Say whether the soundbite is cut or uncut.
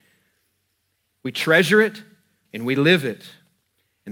cut